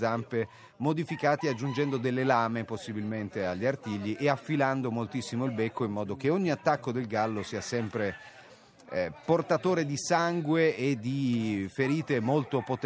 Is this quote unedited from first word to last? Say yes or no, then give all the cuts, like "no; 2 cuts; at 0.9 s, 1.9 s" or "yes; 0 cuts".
yes; 0 cuts